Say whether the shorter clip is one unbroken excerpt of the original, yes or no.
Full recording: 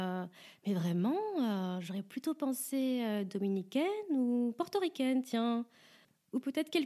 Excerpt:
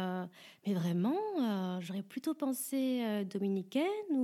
yes